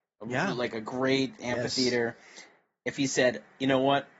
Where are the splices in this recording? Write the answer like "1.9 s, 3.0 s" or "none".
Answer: none